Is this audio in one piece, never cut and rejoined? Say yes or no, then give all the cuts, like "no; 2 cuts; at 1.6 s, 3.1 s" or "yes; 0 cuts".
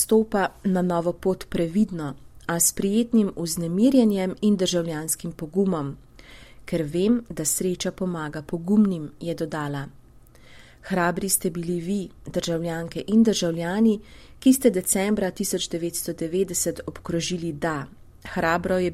yes; 0 cuts